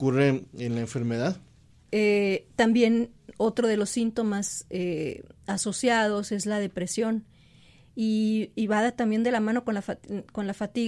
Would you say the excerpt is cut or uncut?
cut